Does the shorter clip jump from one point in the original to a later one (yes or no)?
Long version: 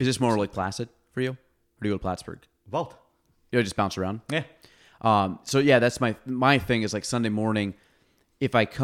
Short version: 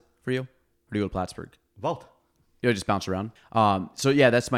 yes